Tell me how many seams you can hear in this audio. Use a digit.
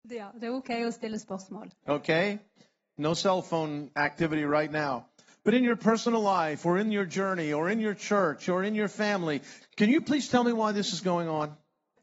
2